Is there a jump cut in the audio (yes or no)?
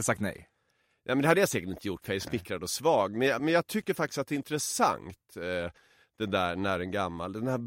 yes